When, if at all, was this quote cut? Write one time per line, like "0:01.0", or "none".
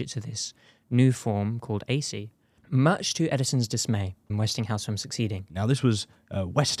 0:04.3
0:05.5